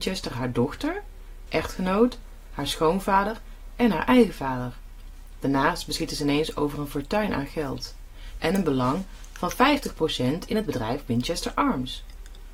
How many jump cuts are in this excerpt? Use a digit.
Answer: 2